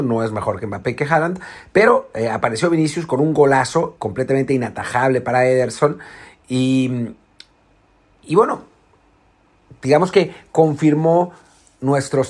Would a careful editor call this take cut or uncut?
cut